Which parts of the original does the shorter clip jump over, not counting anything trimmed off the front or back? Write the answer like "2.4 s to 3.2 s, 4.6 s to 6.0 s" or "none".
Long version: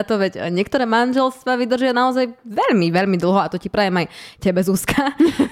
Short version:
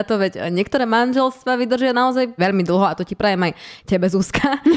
2.4 s to 2.9 s